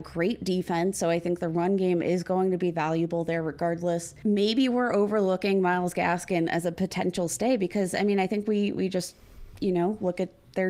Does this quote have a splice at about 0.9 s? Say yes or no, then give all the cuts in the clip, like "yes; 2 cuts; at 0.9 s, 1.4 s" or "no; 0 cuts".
no; 0 cuts